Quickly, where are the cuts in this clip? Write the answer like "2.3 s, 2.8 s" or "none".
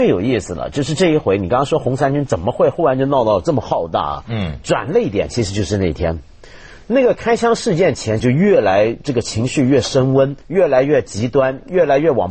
8.2 s, 10.4 s